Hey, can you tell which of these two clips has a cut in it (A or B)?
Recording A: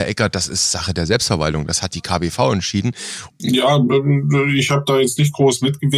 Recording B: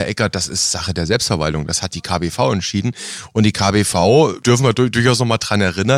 A